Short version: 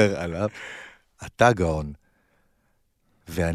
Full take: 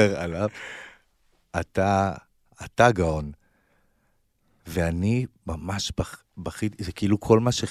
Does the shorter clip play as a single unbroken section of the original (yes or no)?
no